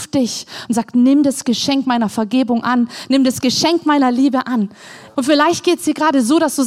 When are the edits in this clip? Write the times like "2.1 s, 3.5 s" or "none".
5.1 s